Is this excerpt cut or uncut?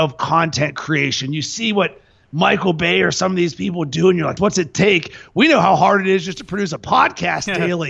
cut